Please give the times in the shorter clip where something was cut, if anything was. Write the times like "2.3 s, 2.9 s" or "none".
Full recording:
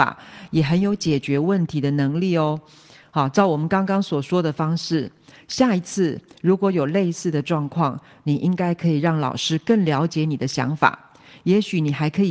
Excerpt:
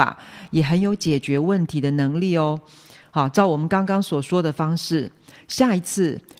none